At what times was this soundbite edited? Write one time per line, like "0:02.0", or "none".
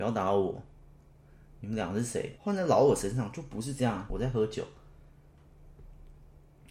0:02.4
0:04.1